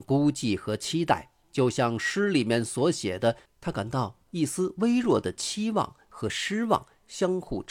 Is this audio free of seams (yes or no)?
no